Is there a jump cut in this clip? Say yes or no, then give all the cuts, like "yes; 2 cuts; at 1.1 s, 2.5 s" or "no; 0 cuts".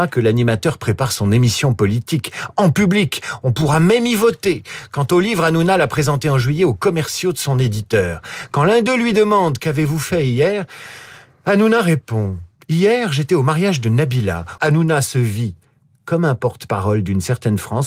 yes; 1 cut; at 14.6 s